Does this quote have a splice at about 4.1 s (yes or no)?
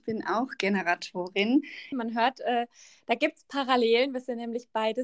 no